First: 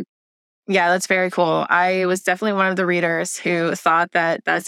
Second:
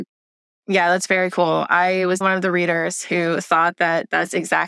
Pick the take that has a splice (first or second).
second